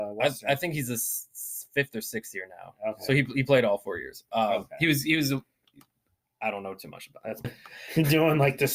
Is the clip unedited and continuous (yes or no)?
no